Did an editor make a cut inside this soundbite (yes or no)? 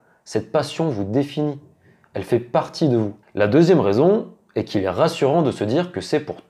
yes